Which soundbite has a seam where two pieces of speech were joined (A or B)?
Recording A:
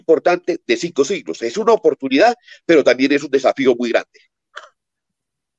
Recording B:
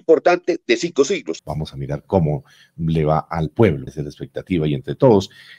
B